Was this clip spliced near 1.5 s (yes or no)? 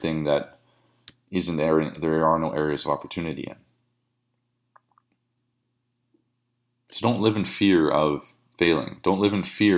no